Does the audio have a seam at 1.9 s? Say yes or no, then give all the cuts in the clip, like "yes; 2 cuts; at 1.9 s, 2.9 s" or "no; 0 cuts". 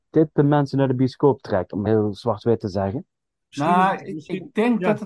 yes; 1 cut; at 1.9 s